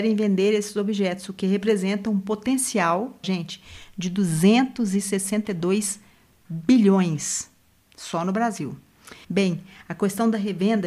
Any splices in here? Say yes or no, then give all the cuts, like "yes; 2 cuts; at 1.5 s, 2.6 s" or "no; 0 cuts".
yes; 2 cuts; at 3.2 s, 9.2 s